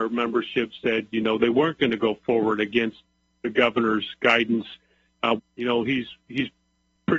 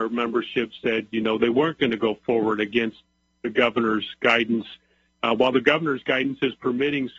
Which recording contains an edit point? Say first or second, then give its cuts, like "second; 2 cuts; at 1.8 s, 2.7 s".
first; 1 cut; at 5.4 s